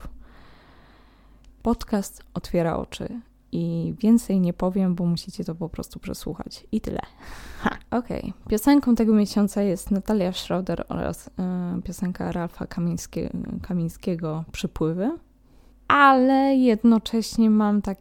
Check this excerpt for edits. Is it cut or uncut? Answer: cut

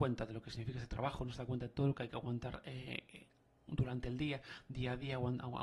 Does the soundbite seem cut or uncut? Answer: uncut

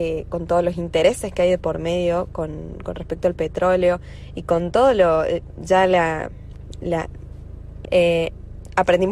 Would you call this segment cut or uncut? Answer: cut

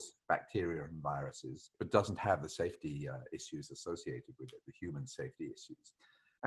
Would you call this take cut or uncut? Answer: uncut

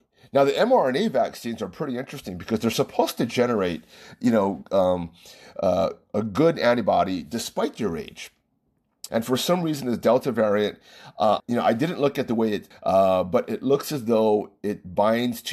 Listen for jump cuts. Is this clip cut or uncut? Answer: cut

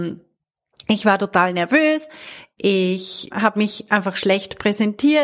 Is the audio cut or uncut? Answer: cut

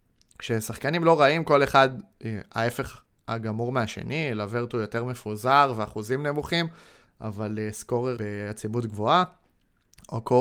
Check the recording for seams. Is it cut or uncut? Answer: cut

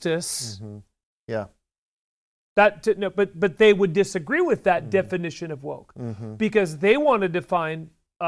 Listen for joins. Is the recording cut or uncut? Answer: cut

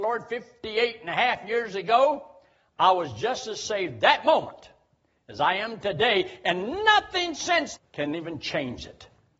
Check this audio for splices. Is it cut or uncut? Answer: cut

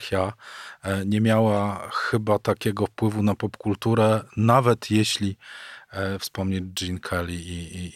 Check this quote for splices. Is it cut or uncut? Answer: uncut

